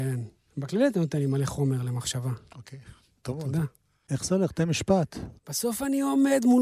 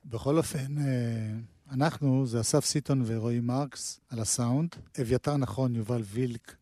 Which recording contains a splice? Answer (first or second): first